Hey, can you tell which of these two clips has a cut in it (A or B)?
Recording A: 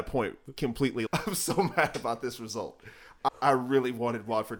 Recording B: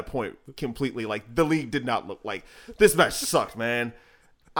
A